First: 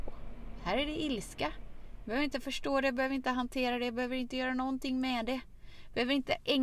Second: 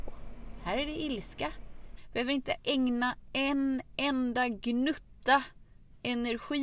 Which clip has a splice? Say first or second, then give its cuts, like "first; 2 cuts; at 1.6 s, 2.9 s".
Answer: second; 1 cut; at 2.0 s